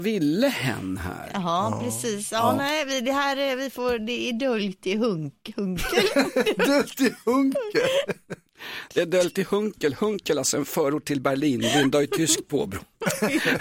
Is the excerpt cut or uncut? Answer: uncut